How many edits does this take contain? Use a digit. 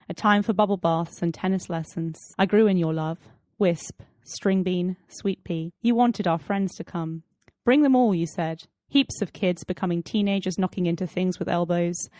2